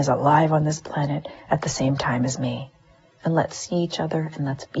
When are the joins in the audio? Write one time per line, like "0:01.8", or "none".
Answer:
0:03.2

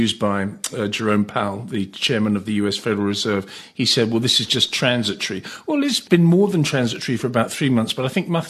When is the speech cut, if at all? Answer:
none

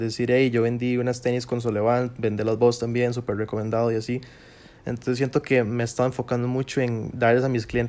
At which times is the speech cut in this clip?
none

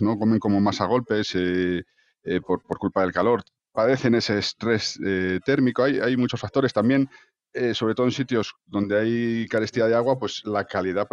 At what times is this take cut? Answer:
none

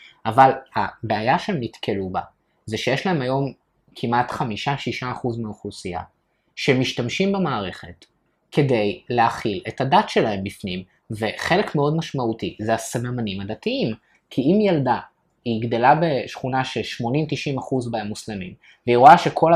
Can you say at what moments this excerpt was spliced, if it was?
none

